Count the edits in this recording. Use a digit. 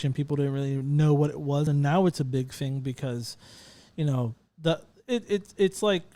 0